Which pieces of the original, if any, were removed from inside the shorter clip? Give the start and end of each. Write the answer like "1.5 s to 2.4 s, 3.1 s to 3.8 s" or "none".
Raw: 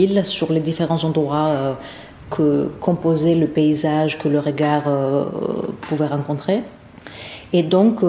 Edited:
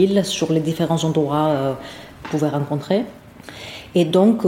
2.2 s to 5.8 s